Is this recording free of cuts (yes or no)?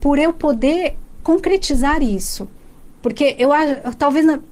yes